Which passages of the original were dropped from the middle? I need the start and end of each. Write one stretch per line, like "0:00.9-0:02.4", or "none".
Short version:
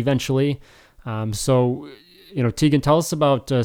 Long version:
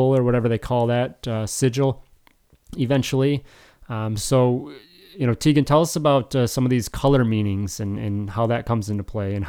none